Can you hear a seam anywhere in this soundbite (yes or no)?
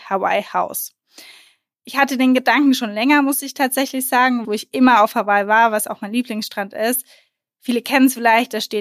yes